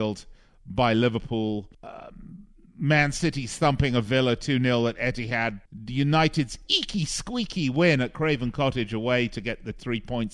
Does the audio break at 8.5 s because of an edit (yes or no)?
no